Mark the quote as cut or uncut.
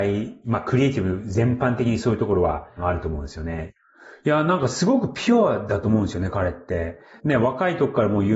uncut